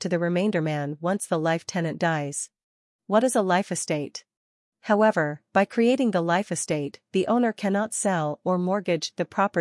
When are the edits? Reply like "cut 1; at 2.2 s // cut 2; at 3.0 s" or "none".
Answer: cut 1; at 3.0 s // cut 2; at 4.6 s